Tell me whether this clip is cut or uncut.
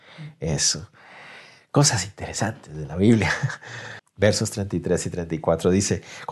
cut